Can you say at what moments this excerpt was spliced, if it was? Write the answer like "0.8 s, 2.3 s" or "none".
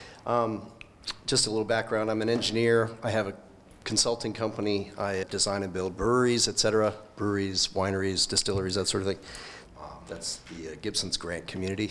5.2 s, 9.6 s